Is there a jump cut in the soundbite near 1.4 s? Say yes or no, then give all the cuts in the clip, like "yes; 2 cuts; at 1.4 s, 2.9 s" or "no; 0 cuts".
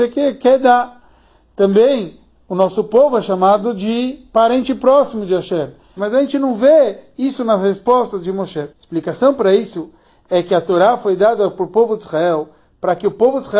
no; 2 cuts; at 6.0 s, 8.7 s